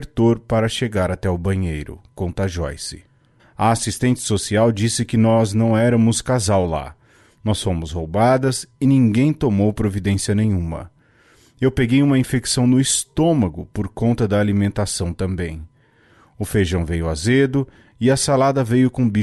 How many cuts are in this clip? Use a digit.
1